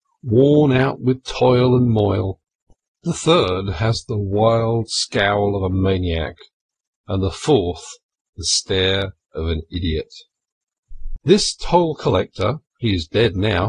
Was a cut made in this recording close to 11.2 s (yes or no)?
yes